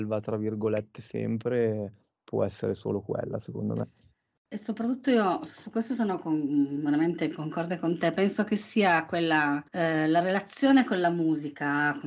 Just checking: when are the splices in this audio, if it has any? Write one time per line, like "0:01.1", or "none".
0:09.7